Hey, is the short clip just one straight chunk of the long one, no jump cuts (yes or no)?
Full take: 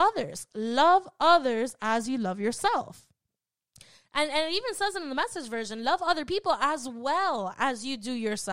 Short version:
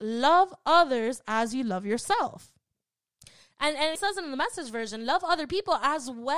no